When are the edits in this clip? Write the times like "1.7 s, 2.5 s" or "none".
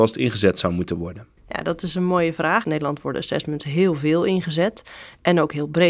1.4 s, 2.6 s